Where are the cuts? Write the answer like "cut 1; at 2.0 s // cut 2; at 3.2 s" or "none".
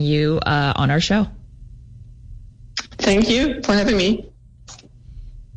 none